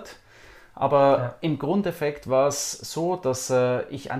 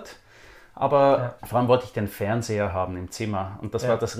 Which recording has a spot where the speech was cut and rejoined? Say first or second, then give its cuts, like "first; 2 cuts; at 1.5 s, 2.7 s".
second; 1 cut; at 1.4 s